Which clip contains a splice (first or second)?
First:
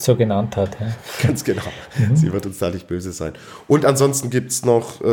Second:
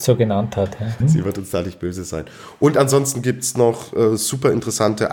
second